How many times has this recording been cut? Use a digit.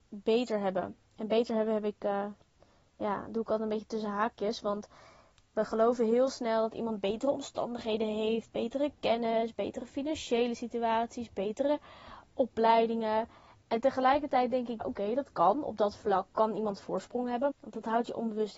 2